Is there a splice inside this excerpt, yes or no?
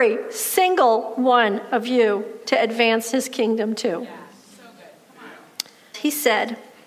yes